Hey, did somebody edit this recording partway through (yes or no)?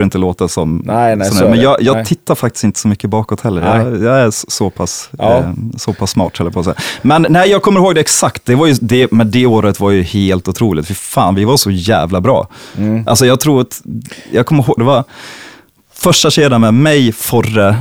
yes